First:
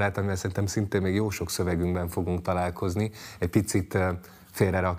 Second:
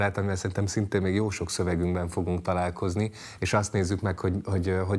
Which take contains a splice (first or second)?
second